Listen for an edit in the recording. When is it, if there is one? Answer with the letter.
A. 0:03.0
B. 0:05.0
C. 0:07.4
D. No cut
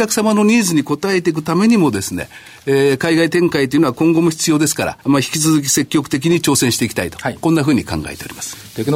B